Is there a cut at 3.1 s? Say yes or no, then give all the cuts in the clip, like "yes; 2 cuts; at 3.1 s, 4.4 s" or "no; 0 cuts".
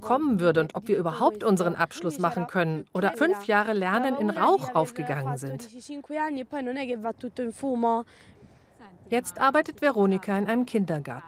yes; 1 cut; at 3.1 s